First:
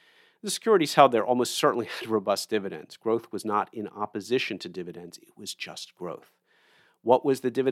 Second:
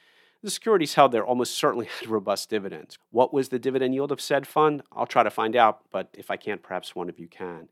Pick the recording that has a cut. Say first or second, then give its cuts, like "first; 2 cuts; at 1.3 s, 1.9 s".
second; 2 cuts; at 3.0 s, 6.1 s